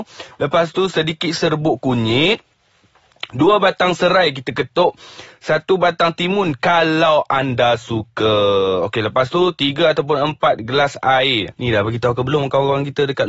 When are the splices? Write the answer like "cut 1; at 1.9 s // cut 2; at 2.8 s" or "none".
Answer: cut 1; at 11.5 s